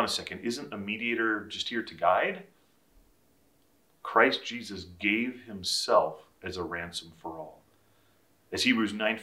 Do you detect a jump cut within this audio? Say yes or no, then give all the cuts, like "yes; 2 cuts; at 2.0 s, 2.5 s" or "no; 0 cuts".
no; 0 cuts